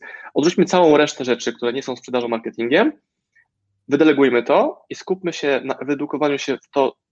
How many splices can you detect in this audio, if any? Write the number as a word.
zero